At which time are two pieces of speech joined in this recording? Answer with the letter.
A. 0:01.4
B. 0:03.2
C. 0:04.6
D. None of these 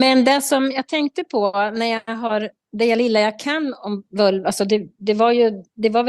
D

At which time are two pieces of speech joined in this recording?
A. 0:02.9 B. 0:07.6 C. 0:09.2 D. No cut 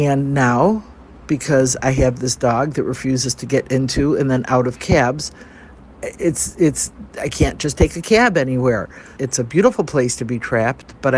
C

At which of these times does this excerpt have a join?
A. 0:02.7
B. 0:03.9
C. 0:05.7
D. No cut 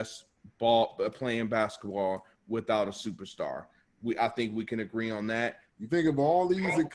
C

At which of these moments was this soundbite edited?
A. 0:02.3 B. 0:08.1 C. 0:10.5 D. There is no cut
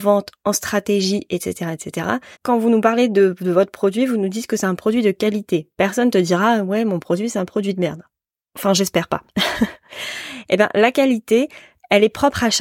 A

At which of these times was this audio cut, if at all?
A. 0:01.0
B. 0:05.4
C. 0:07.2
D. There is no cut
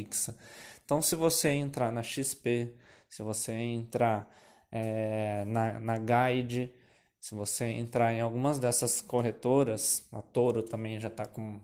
D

